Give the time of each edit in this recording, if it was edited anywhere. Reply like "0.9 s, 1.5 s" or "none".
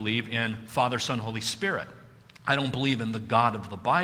none